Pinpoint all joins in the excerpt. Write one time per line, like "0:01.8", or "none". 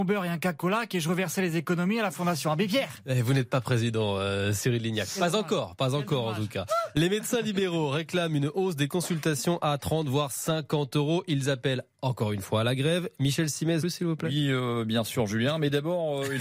0:13.8